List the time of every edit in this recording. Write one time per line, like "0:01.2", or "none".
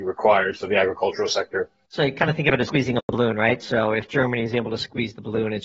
0:01.9